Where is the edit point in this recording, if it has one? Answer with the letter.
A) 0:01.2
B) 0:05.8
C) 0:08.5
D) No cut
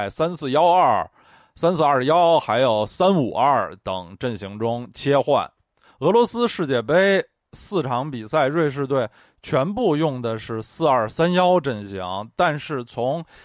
B